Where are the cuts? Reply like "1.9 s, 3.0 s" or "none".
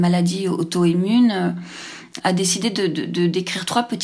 2.2 s